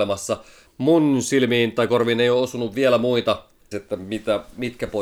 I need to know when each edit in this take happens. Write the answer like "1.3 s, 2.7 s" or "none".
3.7 s

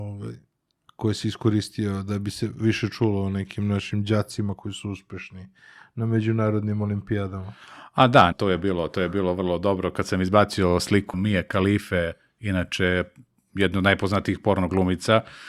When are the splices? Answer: 8.3 s, 11.1 s

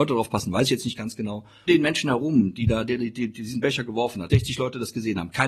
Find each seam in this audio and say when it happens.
1.7 s, 4.3 s

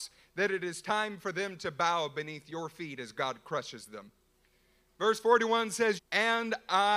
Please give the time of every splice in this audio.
6.0 s

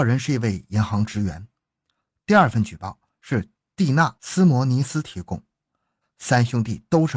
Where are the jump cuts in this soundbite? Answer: 6.0 s

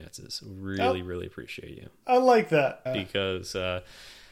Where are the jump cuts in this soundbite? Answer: 2.9 s

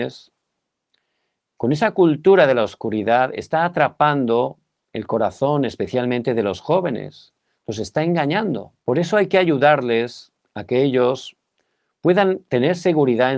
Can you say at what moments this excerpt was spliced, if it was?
8.8 s

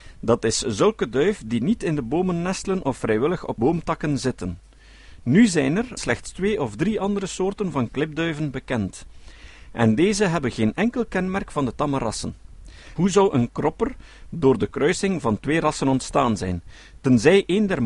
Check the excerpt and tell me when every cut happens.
6.0 s, 13.0 s

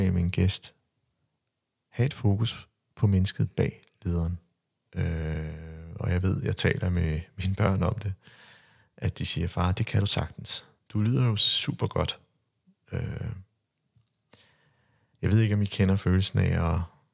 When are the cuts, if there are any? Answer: 4.8 s

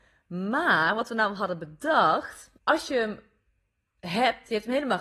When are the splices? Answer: 2.6 s

